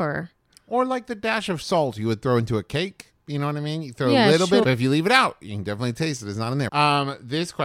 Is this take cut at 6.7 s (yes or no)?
yes